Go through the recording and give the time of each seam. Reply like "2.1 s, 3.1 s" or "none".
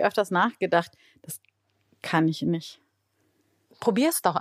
none